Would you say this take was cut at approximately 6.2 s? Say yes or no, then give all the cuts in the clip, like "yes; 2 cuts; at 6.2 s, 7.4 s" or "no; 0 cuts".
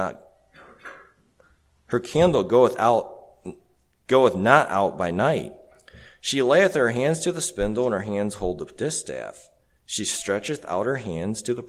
no; 0 cuts